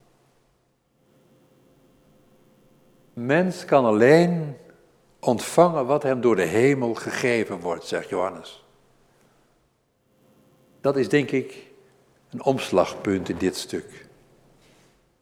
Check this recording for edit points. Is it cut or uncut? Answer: uncut